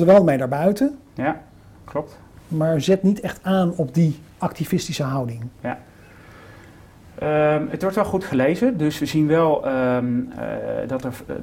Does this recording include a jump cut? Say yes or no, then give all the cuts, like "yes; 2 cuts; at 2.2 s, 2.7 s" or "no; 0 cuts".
no; 0 cuts